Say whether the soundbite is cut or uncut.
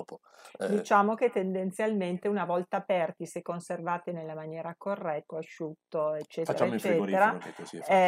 cut